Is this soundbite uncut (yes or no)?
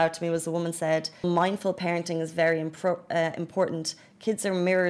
no